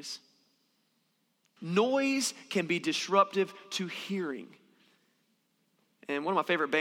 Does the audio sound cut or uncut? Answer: cut